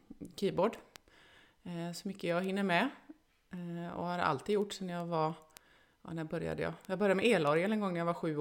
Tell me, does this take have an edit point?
no; 0 cuts

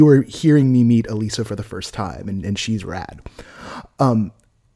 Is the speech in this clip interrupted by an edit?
no; 0 cuts

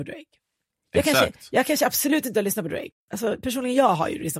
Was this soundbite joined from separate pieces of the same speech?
yes; 1 cut; at 2.9 s

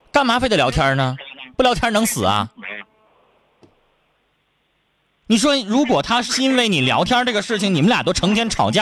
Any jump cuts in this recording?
no; 0 cuts

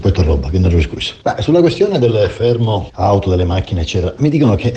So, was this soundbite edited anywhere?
no; 0 cuts

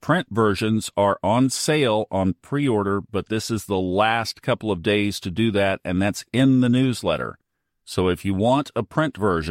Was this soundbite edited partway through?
no; 0 cuts

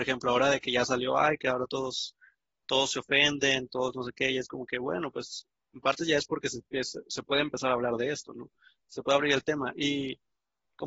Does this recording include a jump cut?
no; 0 cuts

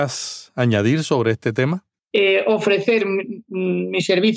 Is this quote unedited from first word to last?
no; 1 cut; at 2.0 s

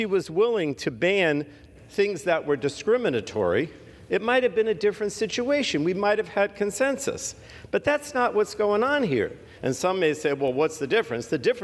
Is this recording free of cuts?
no; 1 cut; at 9.6 s

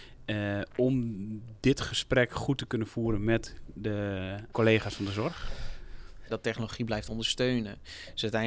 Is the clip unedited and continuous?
no; 2 cuts; at 4.5 s, 6.3 s

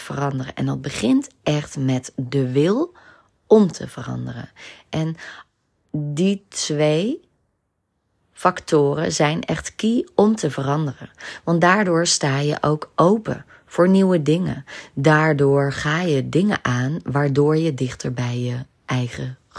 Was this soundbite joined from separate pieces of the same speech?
yes; 1 cut; at 4.9 s

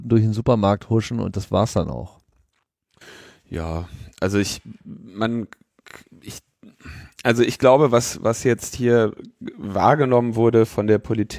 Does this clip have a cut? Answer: no; 0 cuts

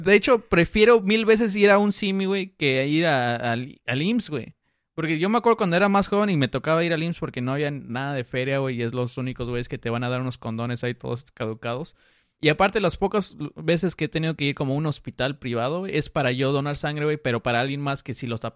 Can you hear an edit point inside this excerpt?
no; 0 cuts

